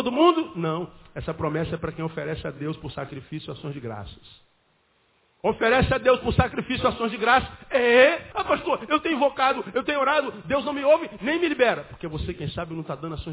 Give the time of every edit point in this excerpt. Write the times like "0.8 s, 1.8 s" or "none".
8.3 s